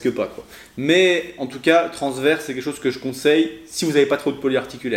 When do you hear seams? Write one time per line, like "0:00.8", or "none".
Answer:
none

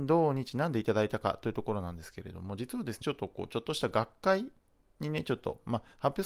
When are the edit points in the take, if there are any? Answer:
0:03.0

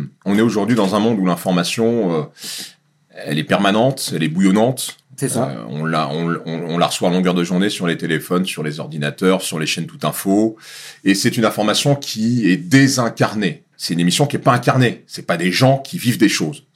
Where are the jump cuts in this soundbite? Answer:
none

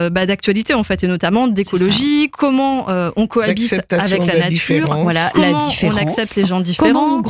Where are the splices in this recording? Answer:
none

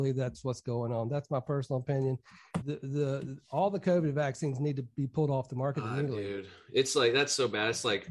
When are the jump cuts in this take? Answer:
0:02.6

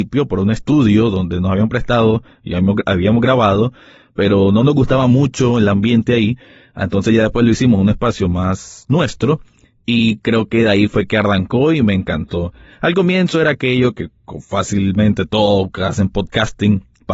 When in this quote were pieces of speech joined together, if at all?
none

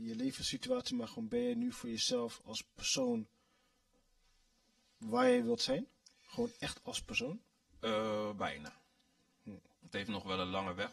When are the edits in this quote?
none

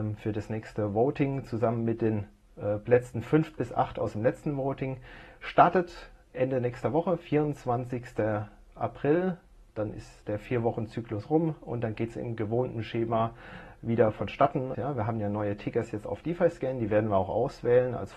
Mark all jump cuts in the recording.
0:14.7

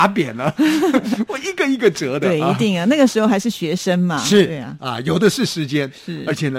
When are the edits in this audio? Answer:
none

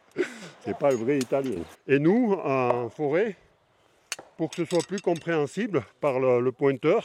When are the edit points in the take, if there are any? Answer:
0:01.7

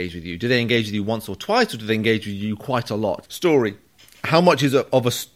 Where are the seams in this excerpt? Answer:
0:03.2

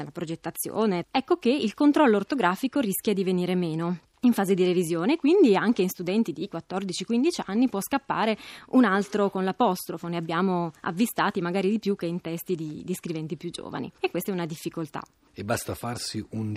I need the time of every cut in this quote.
0:01.0

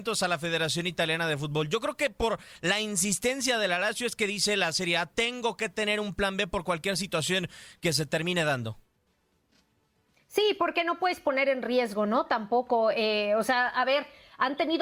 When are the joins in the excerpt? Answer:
0:07.8

